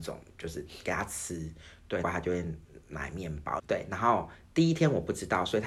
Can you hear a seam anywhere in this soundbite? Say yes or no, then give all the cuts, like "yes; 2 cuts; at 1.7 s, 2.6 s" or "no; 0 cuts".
yes; 2 cuts; at 2.0 s, 3.6 s